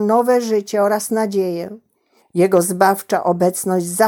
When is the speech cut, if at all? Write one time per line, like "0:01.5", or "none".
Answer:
0:02.2